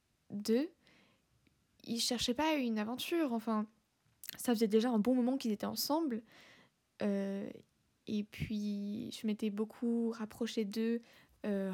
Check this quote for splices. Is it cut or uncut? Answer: uncut